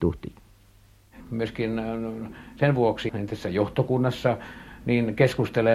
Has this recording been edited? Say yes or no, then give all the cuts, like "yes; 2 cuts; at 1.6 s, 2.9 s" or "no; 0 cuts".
yes; 2 cuts; at 1.2 s, 3.1 s